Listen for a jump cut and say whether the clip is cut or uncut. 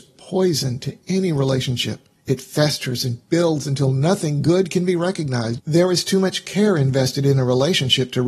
cut